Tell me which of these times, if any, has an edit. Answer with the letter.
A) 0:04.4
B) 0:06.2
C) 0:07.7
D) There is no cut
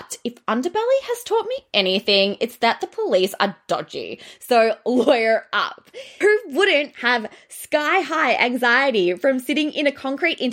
B